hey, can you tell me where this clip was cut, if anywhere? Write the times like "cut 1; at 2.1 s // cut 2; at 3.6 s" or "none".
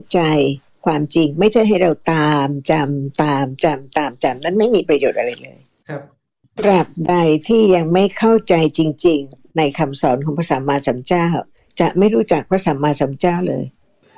none